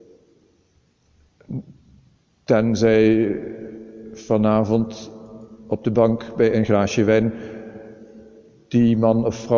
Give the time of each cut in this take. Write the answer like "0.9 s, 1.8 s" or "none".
none